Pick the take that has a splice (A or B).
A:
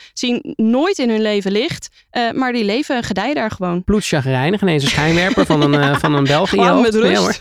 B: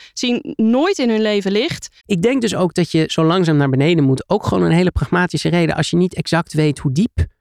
B